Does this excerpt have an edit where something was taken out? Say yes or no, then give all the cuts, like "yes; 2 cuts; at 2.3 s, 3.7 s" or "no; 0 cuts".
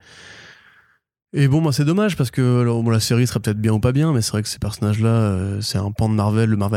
no; 0 cuts